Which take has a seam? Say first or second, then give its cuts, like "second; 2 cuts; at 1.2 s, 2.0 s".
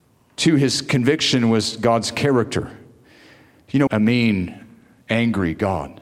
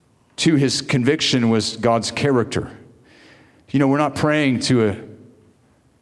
first; 1 cut; at 3.9 s